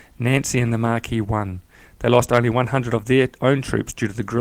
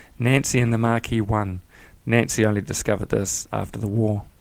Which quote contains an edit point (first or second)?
second